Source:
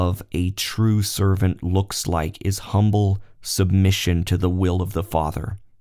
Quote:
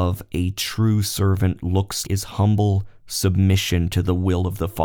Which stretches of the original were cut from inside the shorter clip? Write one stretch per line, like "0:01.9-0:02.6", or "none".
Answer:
0:02.0-0:02.4